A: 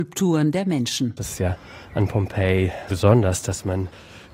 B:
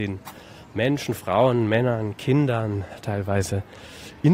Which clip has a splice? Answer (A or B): A